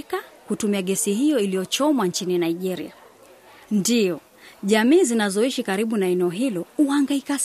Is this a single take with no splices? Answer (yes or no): no